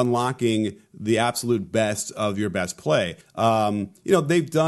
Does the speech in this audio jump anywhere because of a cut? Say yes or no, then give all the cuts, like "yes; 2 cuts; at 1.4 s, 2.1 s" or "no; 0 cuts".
yes; 1 cut; at 3.2 s